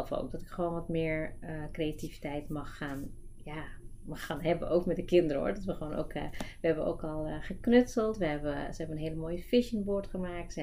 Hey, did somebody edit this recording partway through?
no; 0 cuts

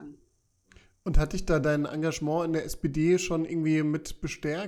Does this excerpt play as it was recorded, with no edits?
yes; 0 cuts

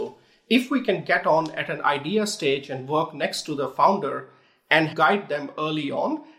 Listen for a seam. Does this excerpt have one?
no; 0 cuts

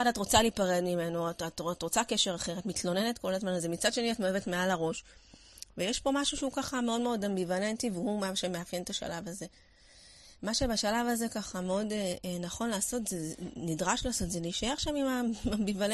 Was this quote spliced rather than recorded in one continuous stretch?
no; 0 cuts

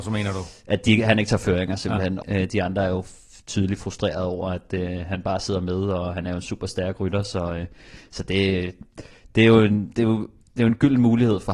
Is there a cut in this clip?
yes; 1 cut; at 2.2 s

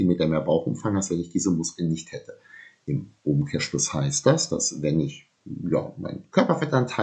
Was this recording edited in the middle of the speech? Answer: yes; 1 cut; at 5.4 s

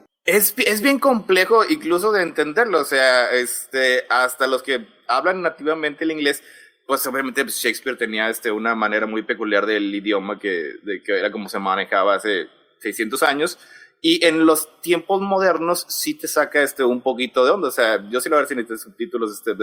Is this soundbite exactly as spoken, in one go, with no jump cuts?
yes; 0 cuts

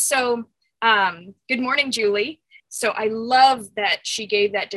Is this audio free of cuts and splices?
no; 1 cut; at 2.6 s

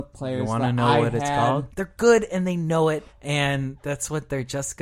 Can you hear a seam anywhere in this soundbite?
yes; 2 cuts; at 1.7 s, 3.1 s

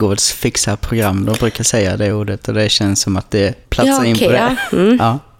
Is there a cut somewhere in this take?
no; 0 cuts

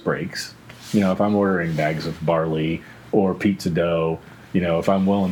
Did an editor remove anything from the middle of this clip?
no; 0 cuts

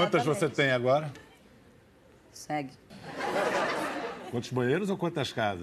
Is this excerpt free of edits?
yes; 0 cuts

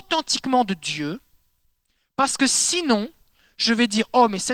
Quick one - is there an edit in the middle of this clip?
no; 0 cuts

